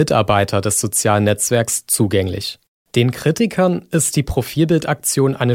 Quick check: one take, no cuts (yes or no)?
no